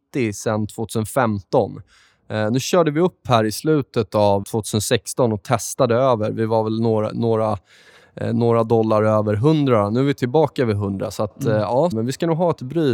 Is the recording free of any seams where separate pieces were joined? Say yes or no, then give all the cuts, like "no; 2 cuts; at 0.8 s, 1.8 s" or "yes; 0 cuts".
no; 2 cuts; at 4.4 s, 11.9 s